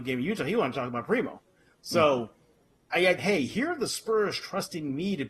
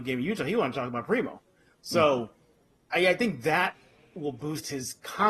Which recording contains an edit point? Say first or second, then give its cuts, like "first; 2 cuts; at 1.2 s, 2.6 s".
first; 1 cut; at 3.2 s